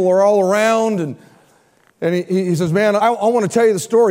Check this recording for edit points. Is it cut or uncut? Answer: cut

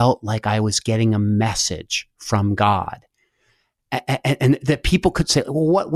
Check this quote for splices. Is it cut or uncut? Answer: uncut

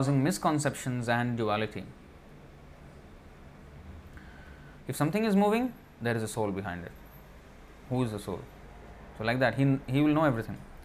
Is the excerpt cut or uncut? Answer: cut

